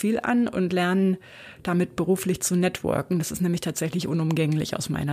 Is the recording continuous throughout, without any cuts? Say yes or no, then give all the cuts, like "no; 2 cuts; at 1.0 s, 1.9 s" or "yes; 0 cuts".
yes; 0 cuts